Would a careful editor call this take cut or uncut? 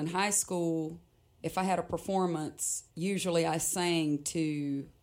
uncut